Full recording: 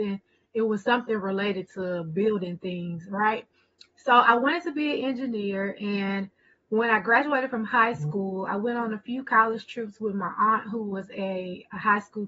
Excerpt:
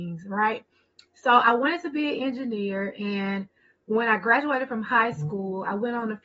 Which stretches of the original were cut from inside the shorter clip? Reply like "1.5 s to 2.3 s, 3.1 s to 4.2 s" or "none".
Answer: none